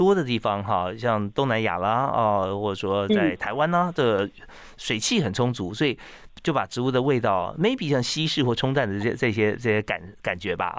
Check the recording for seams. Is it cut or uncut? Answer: uncut